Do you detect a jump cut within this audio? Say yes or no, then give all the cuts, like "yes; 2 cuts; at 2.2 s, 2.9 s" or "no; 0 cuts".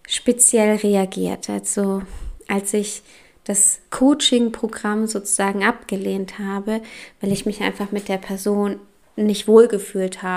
no; 0 cuts